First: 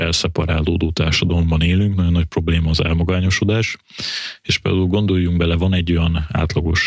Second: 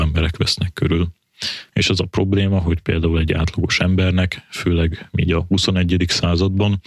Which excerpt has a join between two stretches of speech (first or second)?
second